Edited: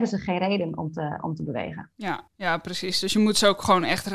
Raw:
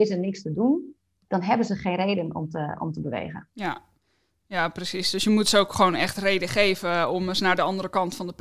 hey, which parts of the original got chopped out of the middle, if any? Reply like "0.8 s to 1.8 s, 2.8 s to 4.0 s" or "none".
3.8 s to 4.4 s

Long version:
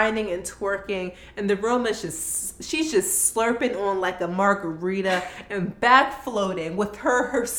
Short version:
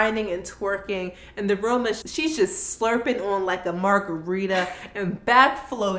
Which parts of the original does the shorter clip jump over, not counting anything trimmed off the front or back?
2.0 s to 2.6 s

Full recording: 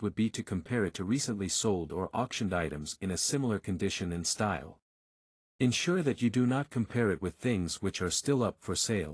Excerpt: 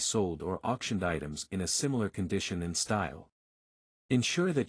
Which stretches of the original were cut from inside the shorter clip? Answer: none

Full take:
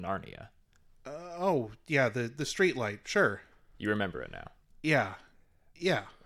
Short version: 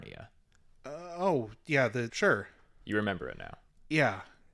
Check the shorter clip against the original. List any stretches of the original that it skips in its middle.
2.3 s to 3.0 s

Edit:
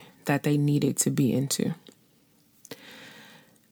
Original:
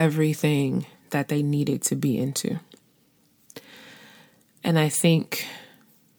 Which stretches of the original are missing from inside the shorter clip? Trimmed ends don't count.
none

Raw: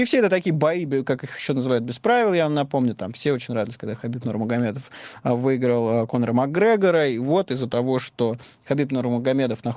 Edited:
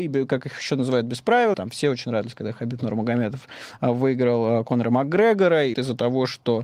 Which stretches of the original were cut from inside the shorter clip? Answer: 2.3 s to 3.0 s, 7.2 s to 7.5 s

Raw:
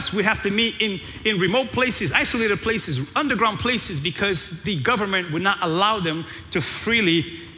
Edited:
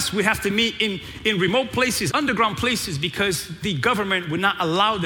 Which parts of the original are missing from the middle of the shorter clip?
2.1 s to 3.1 s

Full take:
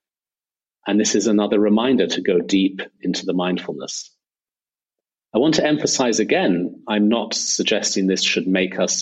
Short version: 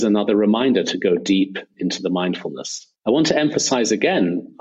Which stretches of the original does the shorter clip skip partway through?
4.2 s to 5.2 s

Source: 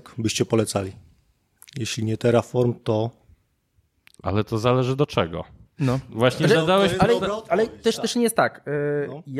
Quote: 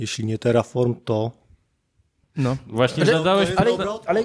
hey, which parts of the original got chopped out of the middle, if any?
4.0 s to 5.7 s

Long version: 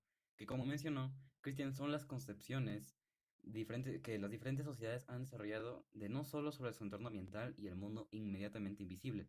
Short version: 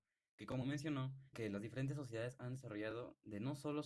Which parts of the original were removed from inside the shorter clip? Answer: 1.3 s to 4.0 s

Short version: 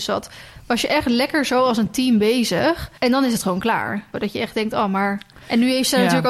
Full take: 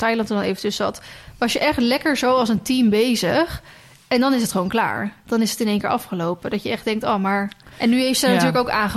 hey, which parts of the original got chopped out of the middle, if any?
3.7 s to 4.1 s, 5.2 s to 6.4 s

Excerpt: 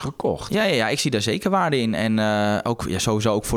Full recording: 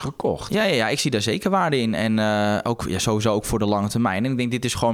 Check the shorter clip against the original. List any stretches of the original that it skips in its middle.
none

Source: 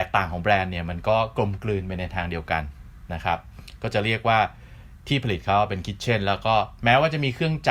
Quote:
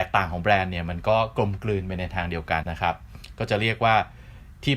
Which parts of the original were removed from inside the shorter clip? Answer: 2.6 s to 3.1 s

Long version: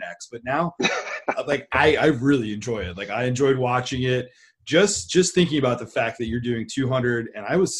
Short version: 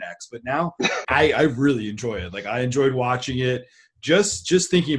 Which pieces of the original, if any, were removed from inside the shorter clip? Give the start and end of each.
1.0 s to 1.7 s

